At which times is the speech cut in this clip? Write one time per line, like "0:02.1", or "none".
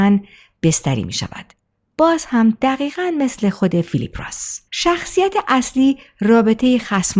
0:04.7